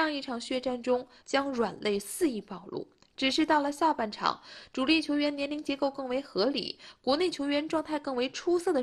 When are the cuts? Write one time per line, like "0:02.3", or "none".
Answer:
0:01.2